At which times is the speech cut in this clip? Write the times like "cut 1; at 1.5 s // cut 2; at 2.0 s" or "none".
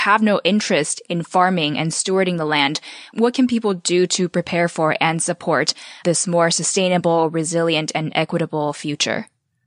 none